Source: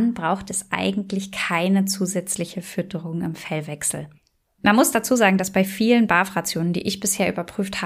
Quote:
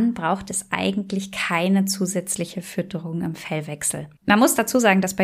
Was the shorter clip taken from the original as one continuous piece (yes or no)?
no